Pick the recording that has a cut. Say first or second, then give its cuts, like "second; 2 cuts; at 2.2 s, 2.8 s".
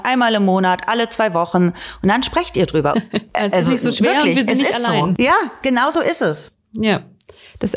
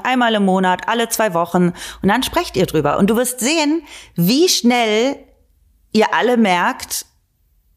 first; 1 cut; at 2.9 s